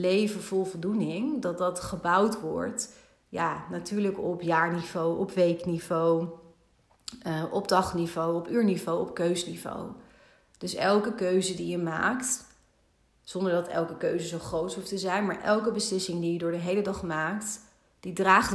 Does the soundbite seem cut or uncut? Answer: uncut